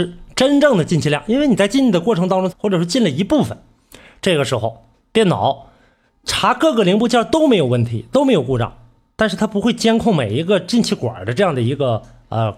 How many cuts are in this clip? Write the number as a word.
one